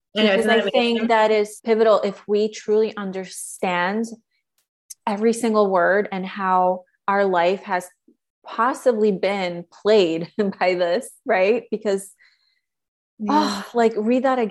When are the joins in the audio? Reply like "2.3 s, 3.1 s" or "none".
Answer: 1.6 s, 6.1 s